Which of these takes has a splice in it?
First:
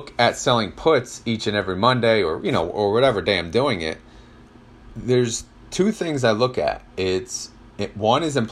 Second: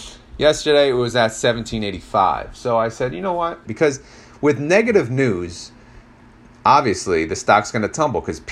second; 1 cut; at 3.6 s

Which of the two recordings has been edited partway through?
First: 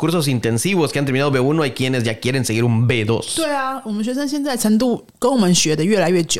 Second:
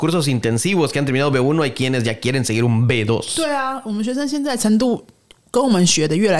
first; 1 cut; at 5.1 s

